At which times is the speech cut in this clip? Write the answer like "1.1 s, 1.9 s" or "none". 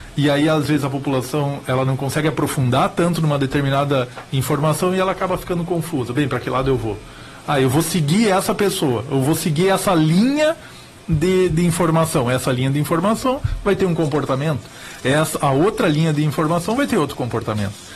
11.5 s